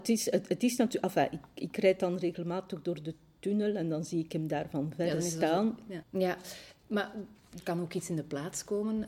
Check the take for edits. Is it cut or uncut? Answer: cut